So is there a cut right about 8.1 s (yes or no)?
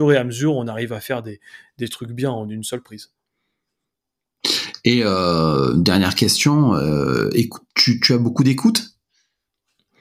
no